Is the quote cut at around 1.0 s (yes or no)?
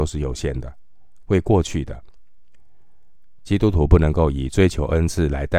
no